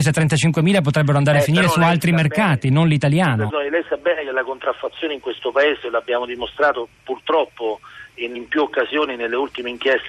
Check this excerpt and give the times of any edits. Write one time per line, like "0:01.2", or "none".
0:03.5
0:08.3